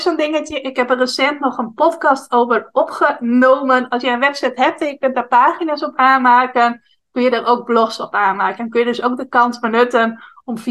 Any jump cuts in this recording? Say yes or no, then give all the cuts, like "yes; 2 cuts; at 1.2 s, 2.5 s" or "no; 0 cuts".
yes; 1 cut; at 3.9 s